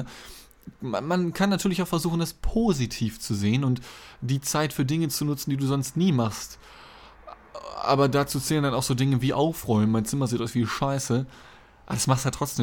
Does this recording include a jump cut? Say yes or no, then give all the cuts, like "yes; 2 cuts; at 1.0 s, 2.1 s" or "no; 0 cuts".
no; 0 cuts